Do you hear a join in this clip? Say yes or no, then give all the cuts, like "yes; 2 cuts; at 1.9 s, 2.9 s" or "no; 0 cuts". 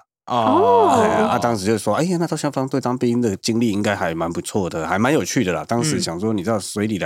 no; 0 cuts